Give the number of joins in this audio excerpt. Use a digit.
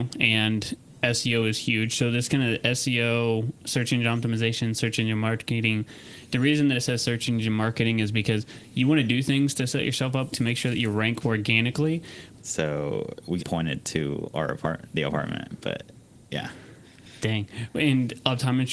3